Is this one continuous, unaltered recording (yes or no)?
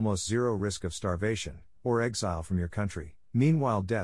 no